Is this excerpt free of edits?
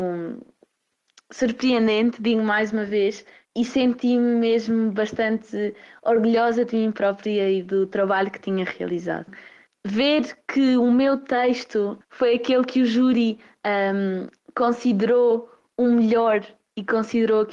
no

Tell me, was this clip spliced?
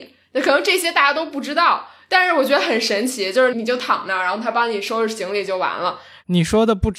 yes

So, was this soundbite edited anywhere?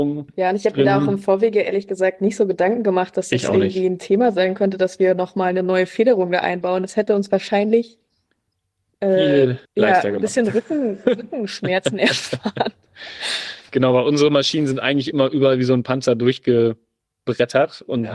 yes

